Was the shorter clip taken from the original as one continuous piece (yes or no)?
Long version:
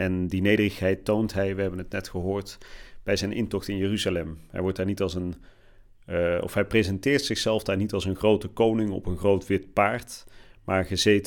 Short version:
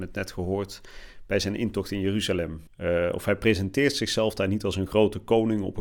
no